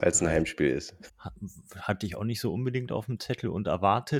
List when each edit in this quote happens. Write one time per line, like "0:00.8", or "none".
0:01.1